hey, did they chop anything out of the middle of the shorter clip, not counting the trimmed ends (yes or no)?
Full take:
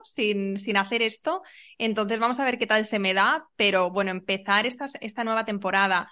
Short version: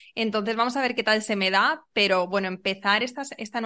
no